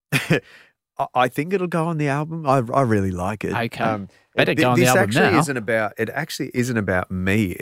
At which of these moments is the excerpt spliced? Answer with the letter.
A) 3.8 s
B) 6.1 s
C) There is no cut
C